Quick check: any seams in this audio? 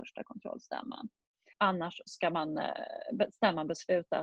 yes; 1 cut; at 1.5 s

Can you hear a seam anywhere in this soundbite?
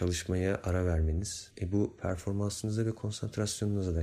yes; 1 cut; at 1.5 s

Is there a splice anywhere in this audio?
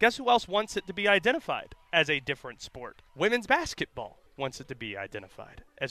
yes; 2 cuts; at 3.1 s, 4.3 s

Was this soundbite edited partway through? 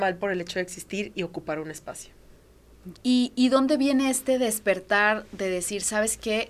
yes; 1 cut; at 2.9 s

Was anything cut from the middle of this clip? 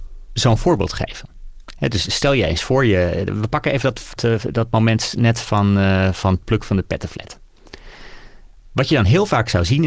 yes; 1 cut; at 4.2 s

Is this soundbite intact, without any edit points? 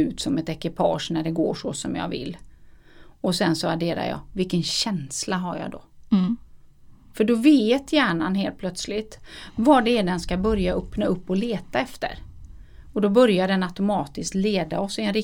yes; 0 cuts

